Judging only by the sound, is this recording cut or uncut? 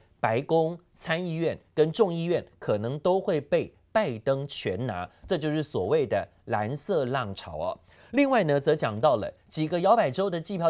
uncut